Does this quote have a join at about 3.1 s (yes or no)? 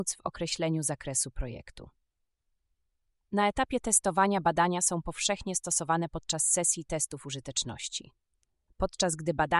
no